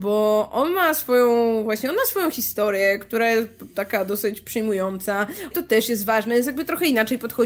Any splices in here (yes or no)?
yes